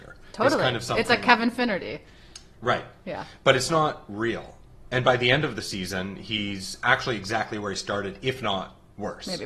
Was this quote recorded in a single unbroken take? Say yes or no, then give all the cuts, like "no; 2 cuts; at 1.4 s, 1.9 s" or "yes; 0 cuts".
yes; 0 cuts